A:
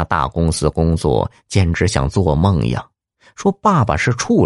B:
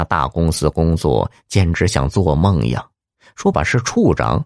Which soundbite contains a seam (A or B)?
B